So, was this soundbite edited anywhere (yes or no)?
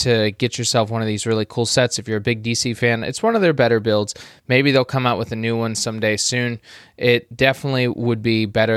no